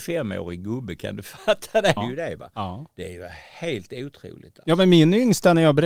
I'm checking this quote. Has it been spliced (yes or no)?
yes